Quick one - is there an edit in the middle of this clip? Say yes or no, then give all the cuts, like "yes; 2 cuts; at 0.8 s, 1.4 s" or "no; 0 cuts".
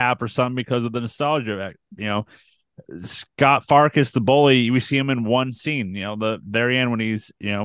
no; 0 cuts